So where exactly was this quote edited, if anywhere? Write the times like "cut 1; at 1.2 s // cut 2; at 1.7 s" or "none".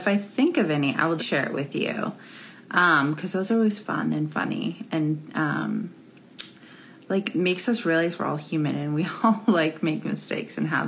cut 1; at 1.2 s